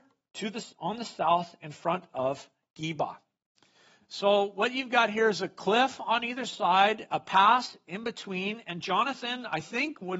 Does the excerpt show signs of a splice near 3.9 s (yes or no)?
no